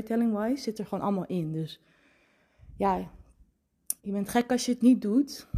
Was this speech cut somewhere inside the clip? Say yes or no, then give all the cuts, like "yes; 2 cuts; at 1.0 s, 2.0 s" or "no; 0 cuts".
yes; 1 cut; at 4.0 s